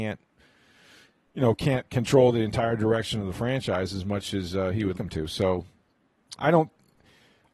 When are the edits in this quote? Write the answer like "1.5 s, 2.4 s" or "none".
4.9 s, 6.3 s